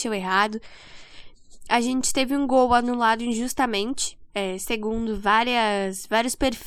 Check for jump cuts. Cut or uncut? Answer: uncut